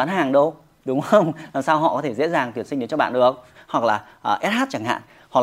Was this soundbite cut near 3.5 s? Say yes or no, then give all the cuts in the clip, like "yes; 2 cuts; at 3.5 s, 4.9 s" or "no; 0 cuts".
yes; 1 cut; at 3.5 s